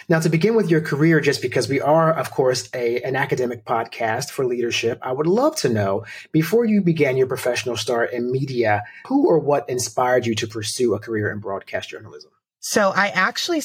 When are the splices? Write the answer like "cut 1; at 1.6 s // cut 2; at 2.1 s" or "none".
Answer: cut 1; at 9.0 s